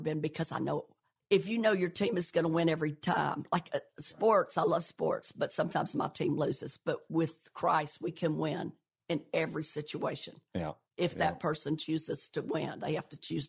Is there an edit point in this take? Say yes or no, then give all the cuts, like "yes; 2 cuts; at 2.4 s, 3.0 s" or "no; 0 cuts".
no; 0 cuts